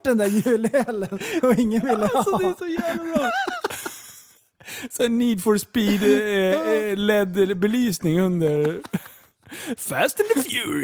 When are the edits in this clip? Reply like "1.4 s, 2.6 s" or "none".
none